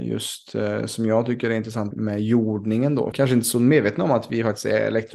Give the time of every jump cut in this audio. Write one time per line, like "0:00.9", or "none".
0:01.9
0:03.1